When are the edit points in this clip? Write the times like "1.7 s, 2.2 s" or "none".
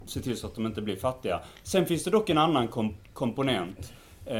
none

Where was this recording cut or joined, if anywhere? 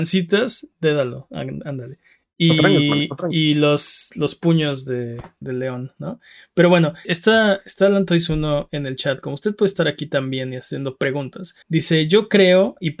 5.4 s, 7.0 s, 11.6 s

